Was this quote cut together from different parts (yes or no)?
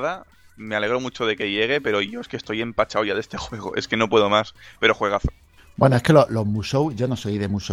no